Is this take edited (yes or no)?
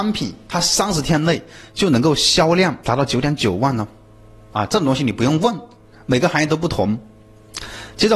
yes